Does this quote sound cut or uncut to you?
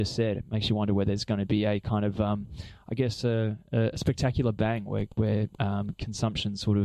uncut